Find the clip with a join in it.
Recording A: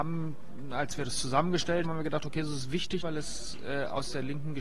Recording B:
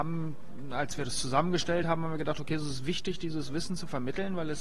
A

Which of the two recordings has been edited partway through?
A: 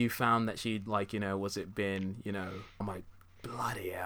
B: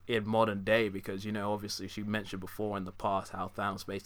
A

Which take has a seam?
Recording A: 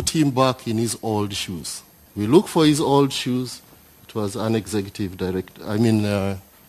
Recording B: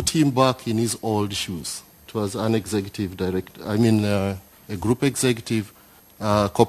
B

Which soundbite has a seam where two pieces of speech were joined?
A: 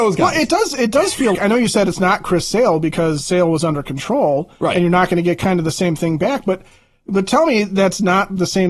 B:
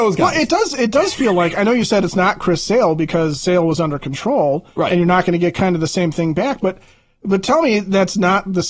A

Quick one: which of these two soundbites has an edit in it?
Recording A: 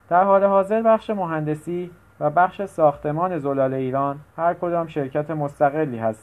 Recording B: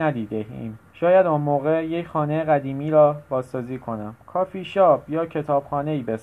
B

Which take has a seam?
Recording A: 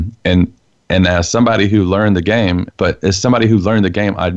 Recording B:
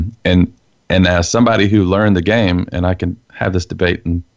A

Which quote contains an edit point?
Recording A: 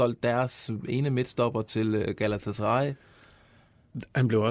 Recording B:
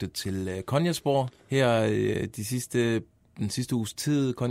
B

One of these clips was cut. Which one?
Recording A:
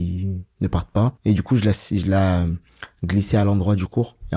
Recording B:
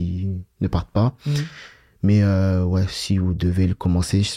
A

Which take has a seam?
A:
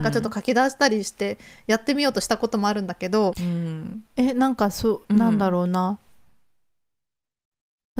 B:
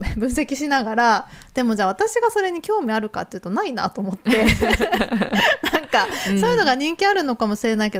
A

